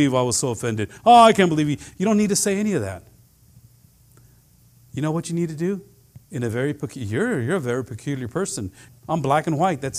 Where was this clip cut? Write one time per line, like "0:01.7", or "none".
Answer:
0:06.2
0:08.9

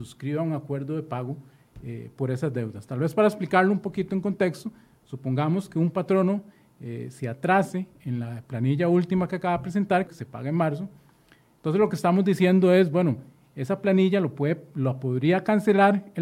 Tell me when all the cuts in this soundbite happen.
0:10.1

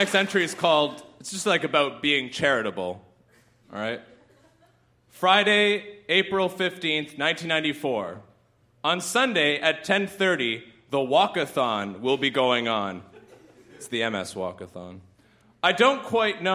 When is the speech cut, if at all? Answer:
none

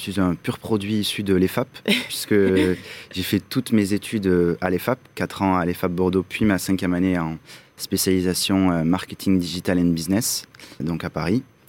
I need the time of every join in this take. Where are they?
0:10.8

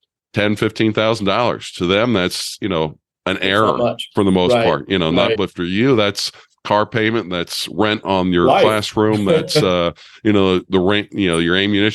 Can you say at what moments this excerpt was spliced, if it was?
0:05.4

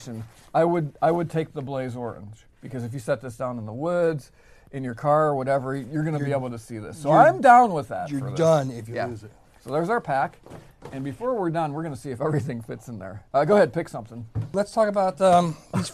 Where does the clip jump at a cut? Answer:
none

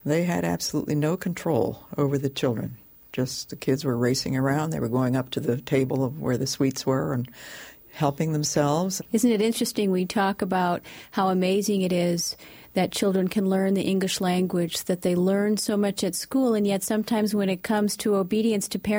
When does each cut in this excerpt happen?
0:09.0

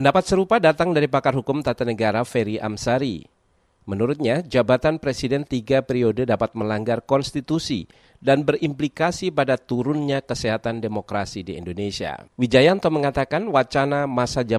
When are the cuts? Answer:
0:12.3

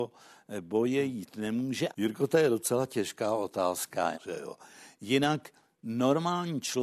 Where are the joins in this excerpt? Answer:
0:01.9
0:04.1

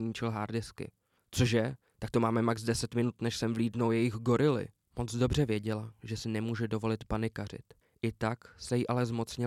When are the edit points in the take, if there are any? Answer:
none

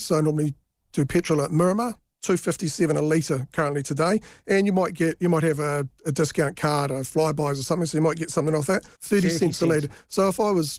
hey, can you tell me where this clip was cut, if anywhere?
0:08.9

